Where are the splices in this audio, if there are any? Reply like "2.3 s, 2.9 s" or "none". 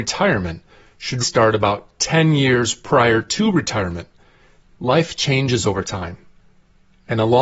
1.2 s, 4.6 s

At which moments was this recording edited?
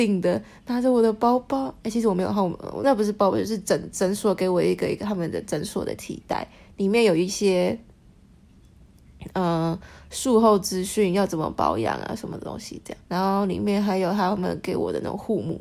2.8 s, 13.1 s

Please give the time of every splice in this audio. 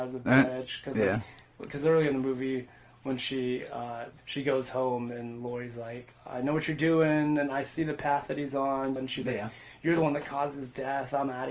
4.2 s, 9.0 s

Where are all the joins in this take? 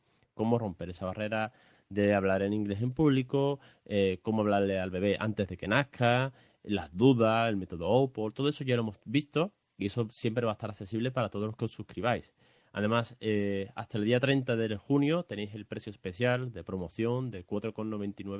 none

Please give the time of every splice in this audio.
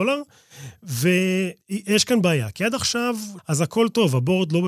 1.6 s, 3.4 s

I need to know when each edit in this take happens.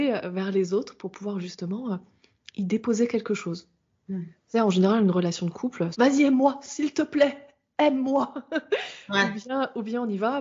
5.9 s

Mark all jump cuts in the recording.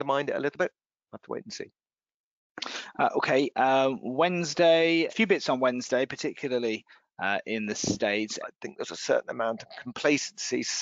5.1 s, 8.4 s

